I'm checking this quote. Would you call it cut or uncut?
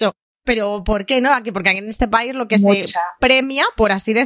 uncut